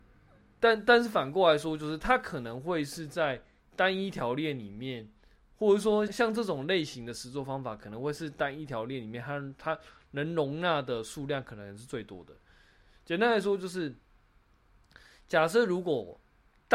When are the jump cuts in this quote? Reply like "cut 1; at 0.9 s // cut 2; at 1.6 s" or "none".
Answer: cut 1; at 6.1 s